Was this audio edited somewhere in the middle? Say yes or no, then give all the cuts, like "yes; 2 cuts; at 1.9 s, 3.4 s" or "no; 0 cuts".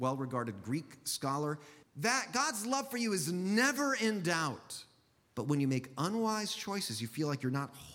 yes; 2 cuts; at 1.8 s, 5.3 s